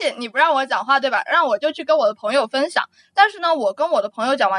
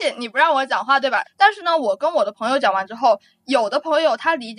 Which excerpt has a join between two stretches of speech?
second; 1 cut; at 1.2 s

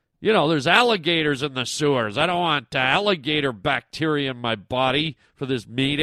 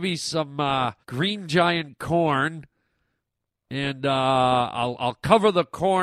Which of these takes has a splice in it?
second; 1 cut; at 1.0 s

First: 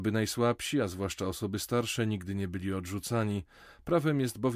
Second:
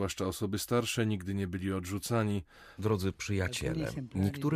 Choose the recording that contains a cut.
second; 1 cut; at 2.8 s

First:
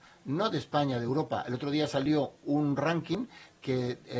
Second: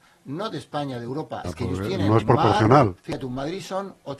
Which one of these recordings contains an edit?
second; 2 cuts; at 1.4 s, 3.0 s

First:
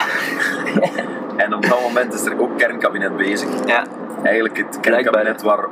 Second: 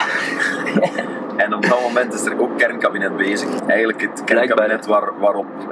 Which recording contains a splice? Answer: second; 1 cut; at 3.6 s

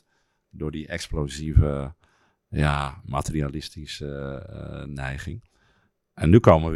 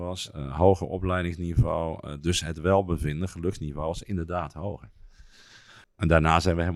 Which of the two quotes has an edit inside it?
second; 1 cut; at 5.8 s

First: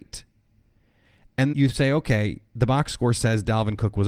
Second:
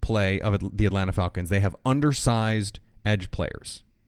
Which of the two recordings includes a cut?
first; 1 cut; at 1.5 s

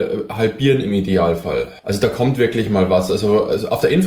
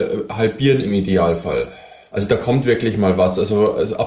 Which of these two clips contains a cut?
first; 1 cut; at 1.8 s

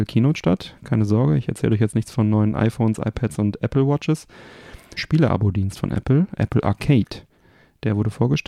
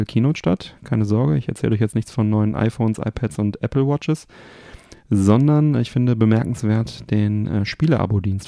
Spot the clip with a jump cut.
first; 1 cut; at 5.0 s

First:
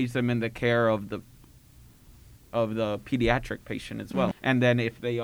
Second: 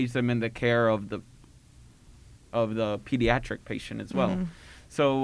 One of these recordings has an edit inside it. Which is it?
first; 1 cut; at 4.3 s

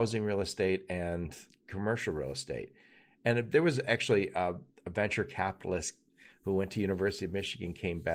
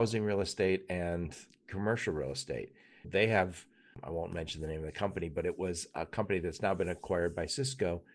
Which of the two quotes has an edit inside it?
second; 1 cut; at 3.0 s

